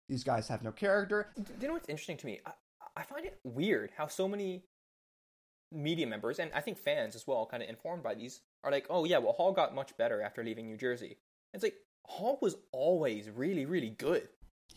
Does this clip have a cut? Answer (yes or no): yes